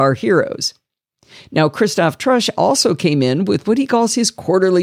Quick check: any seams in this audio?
no; 0 cuts

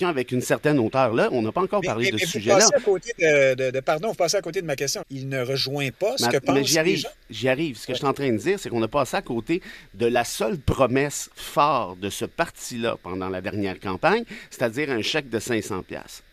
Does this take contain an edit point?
yes; 1 cut; at 5.0 s

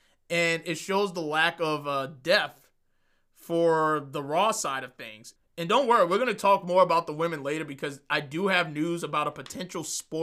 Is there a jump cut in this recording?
yes; 1 cut; at 5.4 s

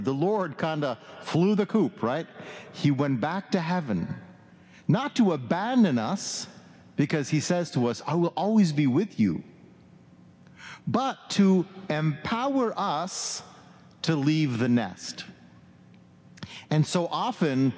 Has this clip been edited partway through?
no; 0 cuts

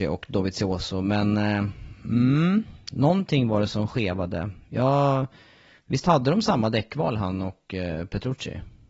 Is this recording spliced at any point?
no; 0 cuts

